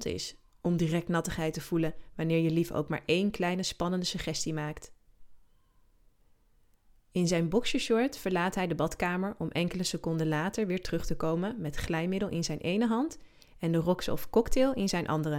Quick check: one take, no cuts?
yes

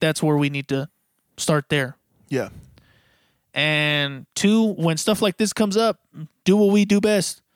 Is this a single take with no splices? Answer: yes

